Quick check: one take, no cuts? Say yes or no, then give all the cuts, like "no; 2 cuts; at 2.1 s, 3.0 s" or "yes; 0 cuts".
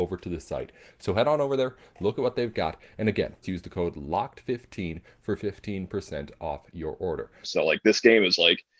no; 2 cuts; at 3.4 s, 7.4 s